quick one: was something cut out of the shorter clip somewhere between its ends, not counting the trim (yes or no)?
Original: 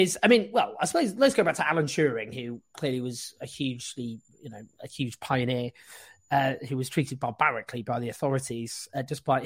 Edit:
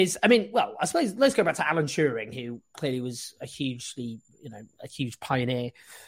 no